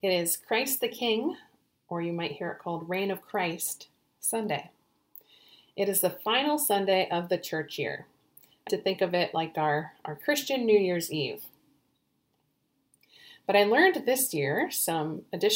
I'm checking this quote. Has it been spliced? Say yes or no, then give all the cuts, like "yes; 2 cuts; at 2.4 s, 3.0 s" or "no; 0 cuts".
yes; 1 cut; at 8.7 s